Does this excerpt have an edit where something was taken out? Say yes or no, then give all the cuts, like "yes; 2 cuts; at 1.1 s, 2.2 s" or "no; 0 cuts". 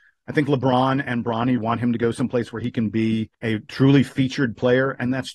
yes; 2 cuts; at 1.6 s, 3.3 s